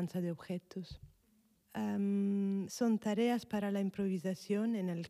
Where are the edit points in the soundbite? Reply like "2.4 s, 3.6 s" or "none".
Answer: 1.5 s